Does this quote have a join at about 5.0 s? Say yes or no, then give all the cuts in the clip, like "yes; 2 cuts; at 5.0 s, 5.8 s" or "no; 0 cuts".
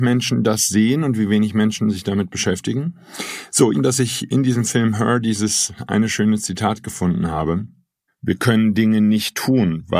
no; 2 cuts; at 3.7 s, 8.1 s